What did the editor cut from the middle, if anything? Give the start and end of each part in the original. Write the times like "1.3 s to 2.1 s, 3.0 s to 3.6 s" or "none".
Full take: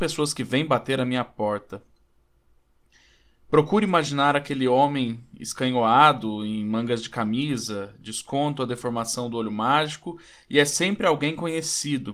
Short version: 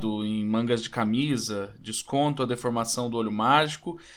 none